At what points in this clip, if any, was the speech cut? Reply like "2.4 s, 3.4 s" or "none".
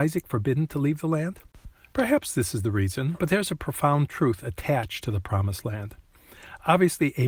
1.9 s, 3.2 s